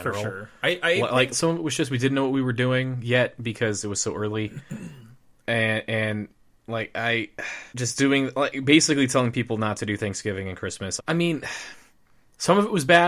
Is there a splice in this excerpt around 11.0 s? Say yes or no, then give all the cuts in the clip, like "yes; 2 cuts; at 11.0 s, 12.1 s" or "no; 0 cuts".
yes; 3 cuts; at 1.3 s, 7.7 s, 11.0 s